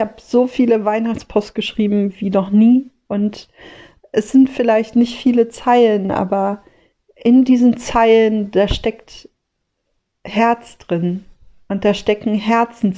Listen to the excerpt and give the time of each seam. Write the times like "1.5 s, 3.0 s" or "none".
none